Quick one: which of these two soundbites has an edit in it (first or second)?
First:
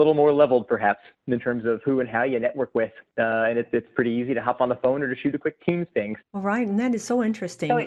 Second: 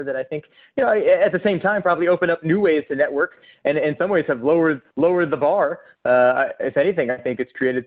first